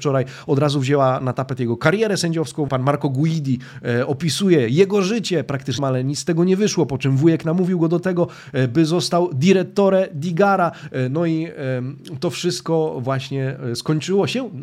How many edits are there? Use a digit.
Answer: 2